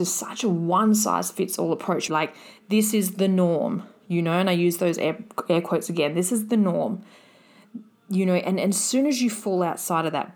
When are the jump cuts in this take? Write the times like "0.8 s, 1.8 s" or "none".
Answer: 2.1 s